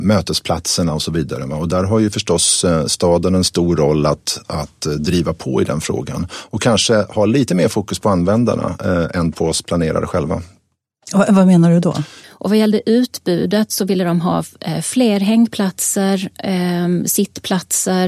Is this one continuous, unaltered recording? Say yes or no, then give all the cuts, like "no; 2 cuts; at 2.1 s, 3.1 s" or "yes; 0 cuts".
no; 1 cut; at 12.2 s